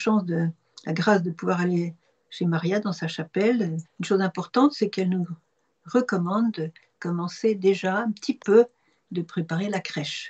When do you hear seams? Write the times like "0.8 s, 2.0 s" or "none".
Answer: 3.8 s